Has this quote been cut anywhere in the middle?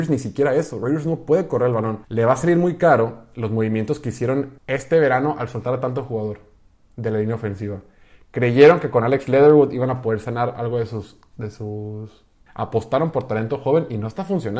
yes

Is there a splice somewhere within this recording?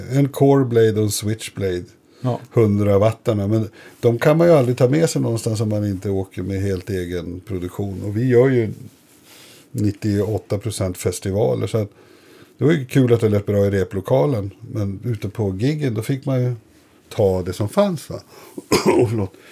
no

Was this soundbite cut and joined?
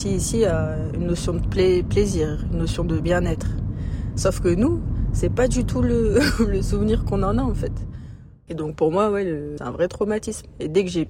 yes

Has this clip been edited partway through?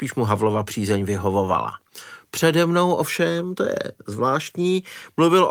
no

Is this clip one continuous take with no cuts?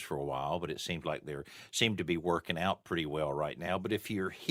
yes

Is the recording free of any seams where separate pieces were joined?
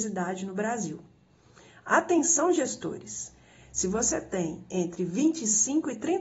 yes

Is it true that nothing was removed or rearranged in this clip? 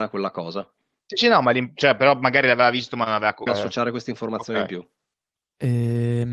no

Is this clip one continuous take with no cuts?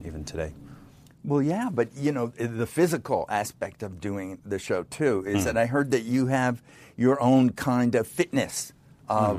yes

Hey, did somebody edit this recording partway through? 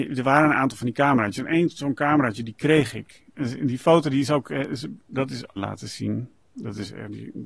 yes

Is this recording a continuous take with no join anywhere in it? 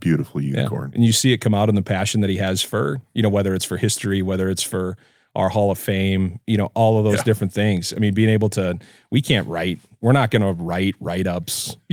yes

